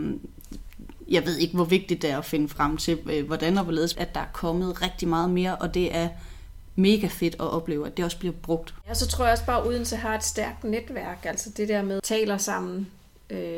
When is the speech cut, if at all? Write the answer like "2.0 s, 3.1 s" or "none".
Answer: 3.9 s, 12.0 s